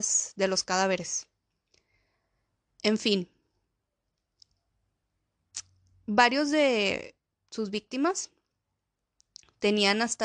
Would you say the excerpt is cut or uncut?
uncut